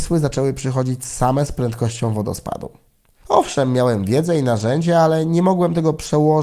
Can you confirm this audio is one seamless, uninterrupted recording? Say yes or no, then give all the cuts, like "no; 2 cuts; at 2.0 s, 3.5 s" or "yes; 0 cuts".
no; 1 cut; at 3.2 s